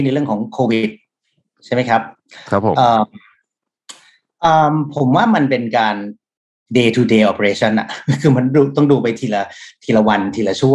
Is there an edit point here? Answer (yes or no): no